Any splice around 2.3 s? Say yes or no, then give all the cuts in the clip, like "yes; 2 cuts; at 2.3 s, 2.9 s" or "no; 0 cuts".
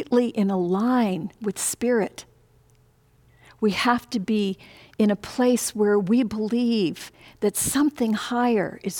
no; 0 cuts